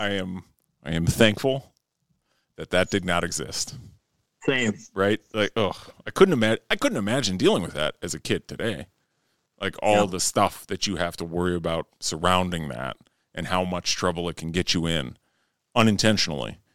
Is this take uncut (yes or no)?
yes